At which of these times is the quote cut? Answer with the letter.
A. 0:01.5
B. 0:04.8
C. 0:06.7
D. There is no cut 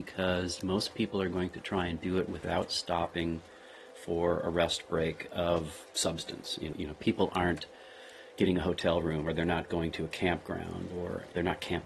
C